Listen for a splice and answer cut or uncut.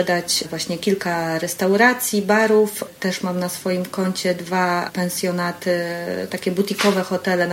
uncut